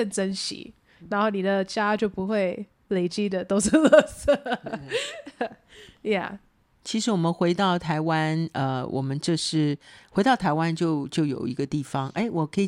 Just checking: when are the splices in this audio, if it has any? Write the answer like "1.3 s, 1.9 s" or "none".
none